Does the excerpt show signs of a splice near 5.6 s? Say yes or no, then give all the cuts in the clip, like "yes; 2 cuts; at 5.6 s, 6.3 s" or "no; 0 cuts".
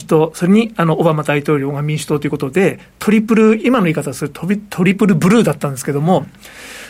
no; 1 cut; at 3.6 s